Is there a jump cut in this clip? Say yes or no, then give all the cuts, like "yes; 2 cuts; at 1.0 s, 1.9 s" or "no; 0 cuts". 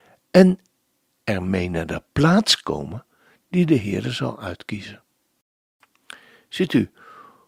no; 0 cuts